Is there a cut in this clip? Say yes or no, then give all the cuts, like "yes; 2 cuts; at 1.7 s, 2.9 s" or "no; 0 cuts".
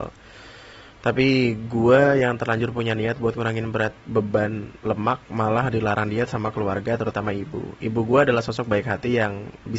no; 0 cuts